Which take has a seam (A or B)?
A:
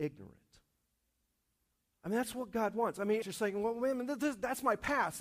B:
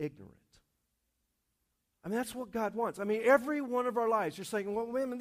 A